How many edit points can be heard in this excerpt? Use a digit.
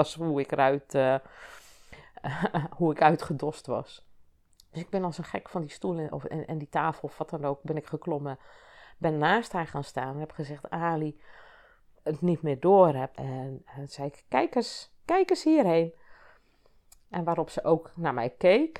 2